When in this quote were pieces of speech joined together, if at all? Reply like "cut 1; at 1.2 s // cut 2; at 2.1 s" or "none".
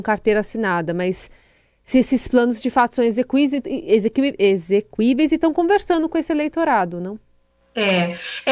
none